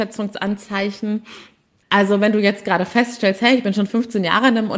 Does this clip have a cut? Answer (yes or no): yes